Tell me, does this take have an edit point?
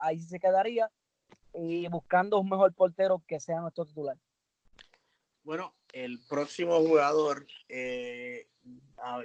no; 0 cuts

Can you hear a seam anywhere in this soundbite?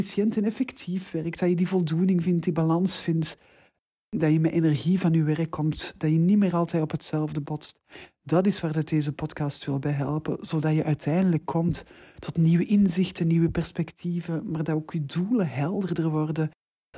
no; 0 cuts

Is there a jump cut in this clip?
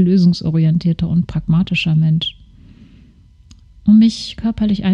no; 0 cuts

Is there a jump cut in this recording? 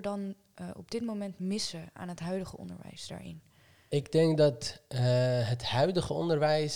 no; 0 cuts

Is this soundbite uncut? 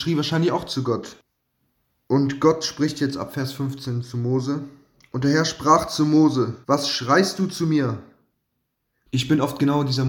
no; 2 cuts; at 6.6 s, 9.1 s

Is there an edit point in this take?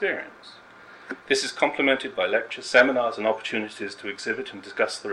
yes; 1 cut; at 1.2 s

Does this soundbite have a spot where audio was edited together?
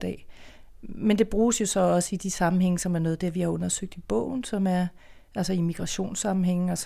no; 0 cuts

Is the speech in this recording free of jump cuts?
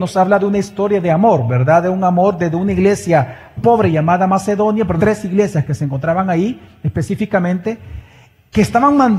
no; 2 cuts; at 3.6 s, 5.0 s

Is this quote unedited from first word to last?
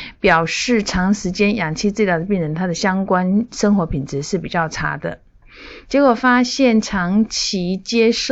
no; 1 cut; at 5.8 s

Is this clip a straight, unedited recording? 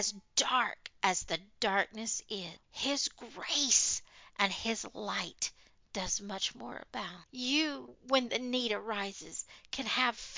no; 2 cuts; at 2.6 s, 7.3 s

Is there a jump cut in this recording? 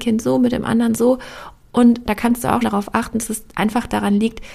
yes; 1 cut; at 2.6 s

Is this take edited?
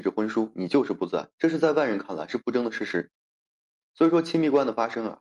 yes; 1 cut; at 1.3 s

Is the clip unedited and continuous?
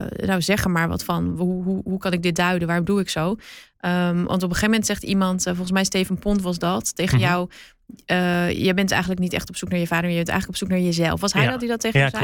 yes; 0 cuts

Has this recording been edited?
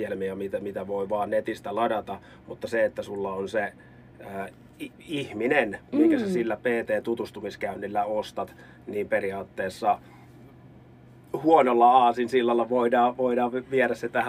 no; 0 cuts

